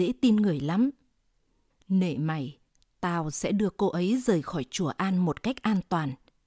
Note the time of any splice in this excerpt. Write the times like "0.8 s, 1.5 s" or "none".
1.7 s